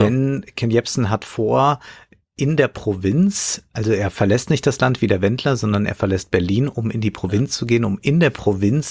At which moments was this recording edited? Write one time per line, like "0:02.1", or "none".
none